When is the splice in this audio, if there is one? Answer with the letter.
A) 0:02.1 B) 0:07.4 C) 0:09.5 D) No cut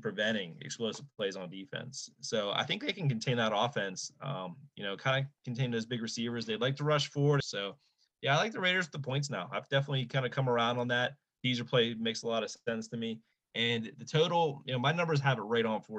B